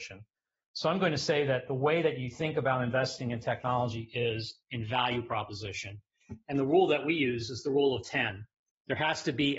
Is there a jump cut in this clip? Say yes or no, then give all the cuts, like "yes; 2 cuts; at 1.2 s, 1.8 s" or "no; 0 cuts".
no; 0 cuts